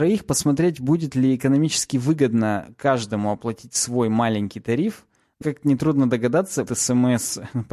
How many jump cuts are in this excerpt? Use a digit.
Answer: 2